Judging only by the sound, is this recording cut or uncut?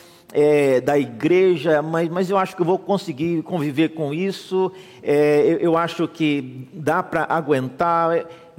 uncut